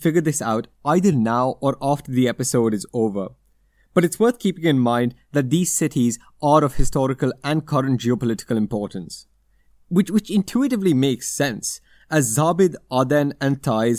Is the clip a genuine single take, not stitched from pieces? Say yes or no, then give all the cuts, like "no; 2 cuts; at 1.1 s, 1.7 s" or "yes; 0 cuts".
yes; 0 cuts